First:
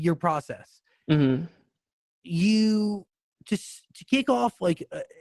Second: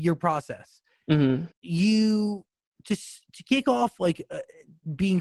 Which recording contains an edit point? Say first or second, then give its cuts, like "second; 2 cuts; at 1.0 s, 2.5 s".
second; 1 cut; at 1.5 s